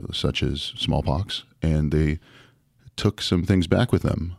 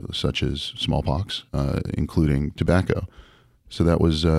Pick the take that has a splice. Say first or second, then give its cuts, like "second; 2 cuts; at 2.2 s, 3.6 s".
second; 1 cut; at 1.5 s